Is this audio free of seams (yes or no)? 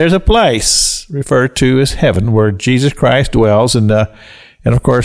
yes